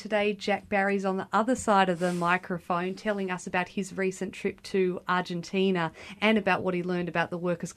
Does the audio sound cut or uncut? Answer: uncut